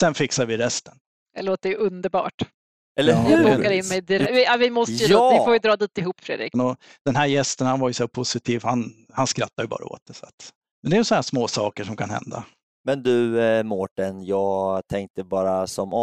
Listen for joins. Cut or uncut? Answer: cut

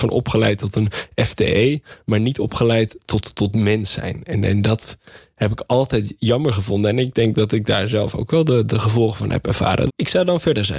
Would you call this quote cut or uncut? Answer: cut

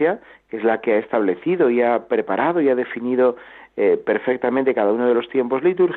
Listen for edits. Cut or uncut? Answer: uncut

